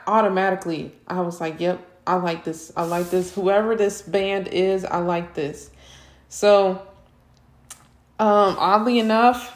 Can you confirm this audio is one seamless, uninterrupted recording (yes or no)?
no